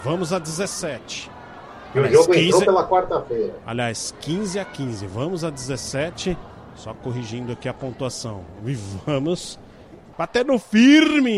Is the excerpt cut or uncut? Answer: cut